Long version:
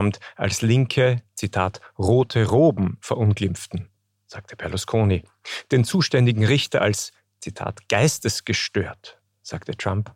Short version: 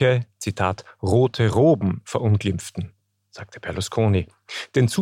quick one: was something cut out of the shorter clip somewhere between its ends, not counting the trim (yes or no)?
no